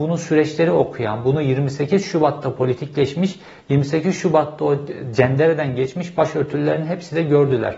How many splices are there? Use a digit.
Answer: 0